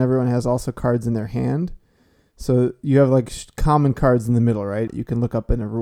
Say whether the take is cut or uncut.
cut